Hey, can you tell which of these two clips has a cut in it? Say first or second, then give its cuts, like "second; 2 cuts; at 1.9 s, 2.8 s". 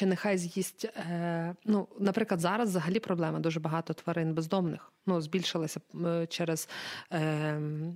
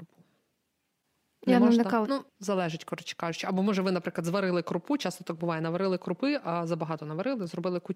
second; 1 cut; at 2.0 s